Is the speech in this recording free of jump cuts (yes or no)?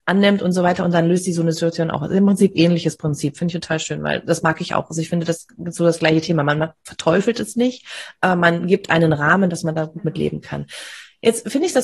yes